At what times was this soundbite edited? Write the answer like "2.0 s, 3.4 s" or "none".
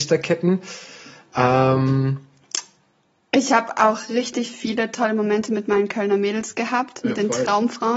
none

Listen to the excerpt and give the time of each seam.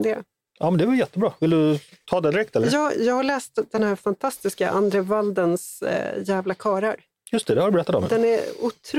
2.9 s

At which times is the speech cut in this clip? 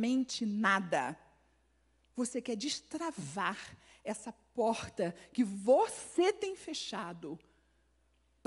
2.1 s

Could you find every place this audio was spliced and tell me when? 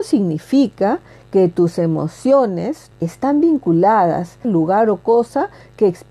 2.9 s, 4.4 s

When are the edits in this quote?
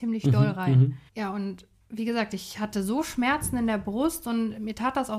1.1 s

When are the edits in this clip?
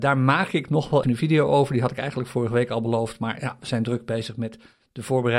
1.0 s

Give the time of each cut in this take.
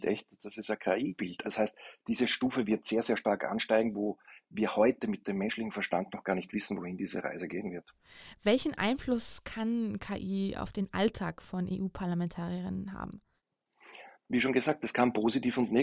1.4 s

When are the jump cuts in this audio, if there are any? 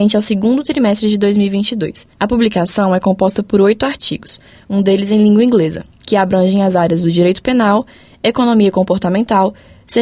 none

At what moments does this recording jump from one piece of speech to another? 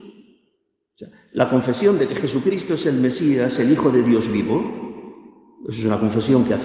none

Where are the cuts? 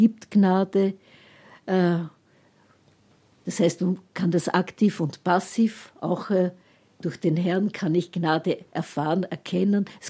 none

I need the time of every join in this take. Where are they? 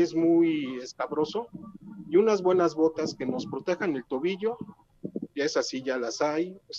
5.3 s

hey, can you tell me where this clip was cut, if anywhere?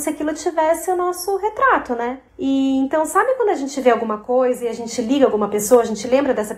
2.3 s

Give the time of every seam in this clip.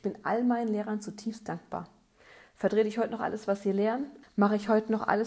4.2 s

